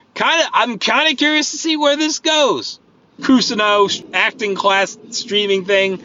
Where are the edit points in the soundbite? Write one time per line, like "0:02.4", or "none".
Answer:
0:03.2